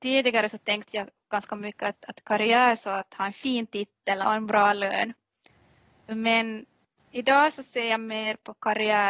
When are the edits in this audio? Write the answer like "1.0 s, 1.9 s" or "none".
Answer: 4.2 s